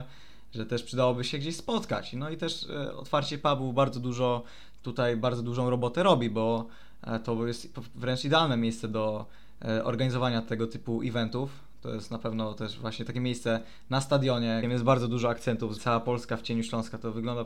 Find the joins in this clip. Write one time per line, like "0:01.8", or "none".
0:14.6
0:15.8